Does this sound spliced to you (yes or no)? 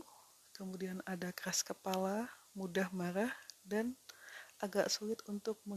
no